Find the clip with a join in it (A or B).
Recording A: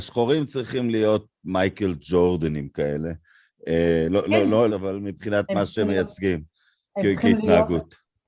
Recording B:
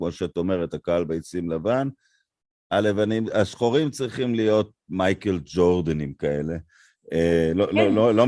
A